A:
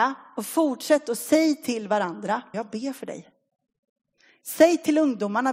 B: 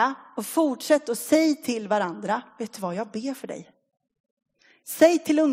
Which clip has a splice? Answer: A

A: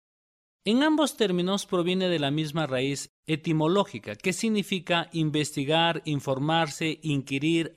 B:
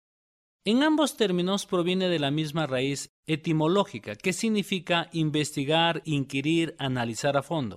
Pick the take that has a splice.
B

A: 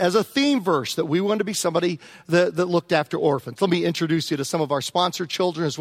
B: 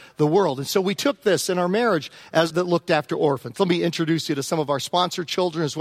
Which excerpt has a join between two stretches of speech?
B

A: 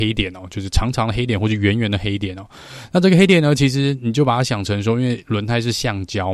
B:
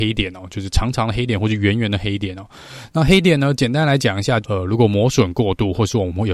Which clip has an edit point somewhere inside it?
B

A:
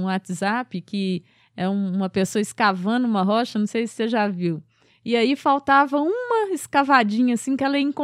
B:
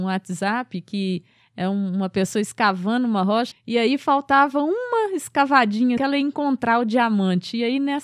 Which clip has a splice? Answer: B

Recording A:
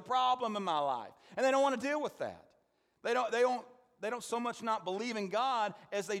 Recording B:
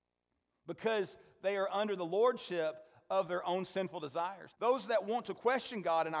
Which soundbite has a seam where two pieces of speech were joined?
B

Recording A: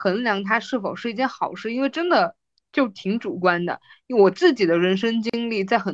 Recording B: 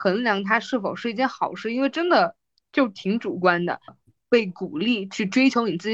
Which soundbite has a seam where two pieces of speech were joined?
B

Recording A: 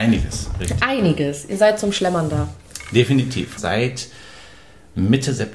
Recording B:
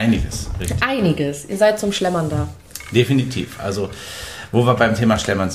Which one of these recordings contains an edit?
A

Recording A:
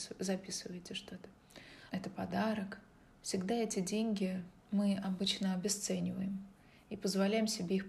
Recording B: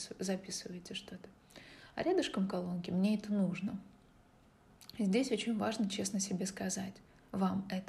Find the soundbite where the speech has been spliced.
A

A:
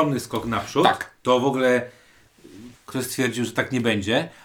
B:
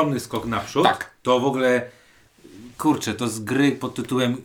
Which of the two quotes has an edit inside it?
A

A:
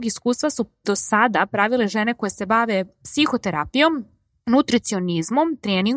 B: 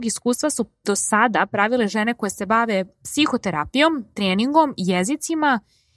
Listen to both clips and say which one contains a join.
B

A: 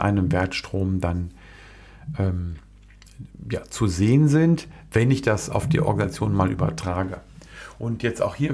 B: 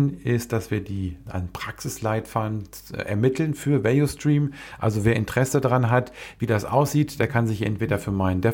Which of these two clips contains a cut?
B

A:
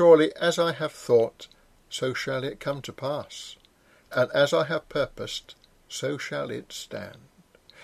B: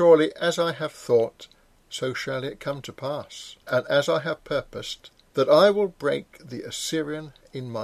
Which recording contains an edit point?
B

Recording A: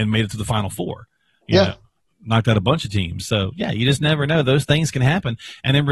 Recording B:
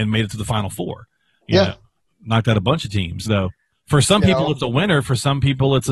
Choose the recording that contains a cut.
B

